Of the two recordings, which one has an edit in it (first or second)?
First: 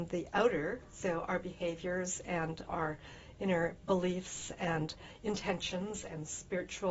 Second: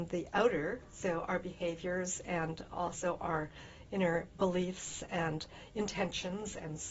first